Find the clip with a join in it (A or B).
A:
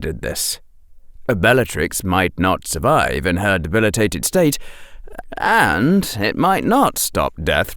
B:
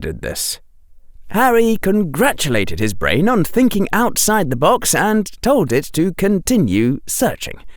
B